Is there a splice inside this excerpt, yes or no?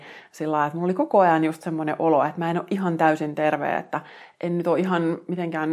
no